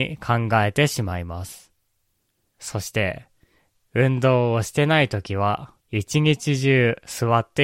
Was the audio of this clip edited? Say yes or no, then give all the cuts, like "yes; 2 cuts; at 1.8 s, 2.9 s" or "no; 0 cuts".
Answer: yes; 2 cuts; at 2.5 s, 5.8 s